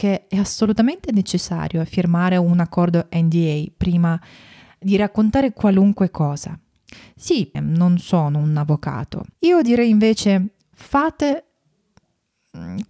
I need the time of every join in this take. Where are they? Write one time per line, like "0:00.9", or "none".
0:07.5
0:09.3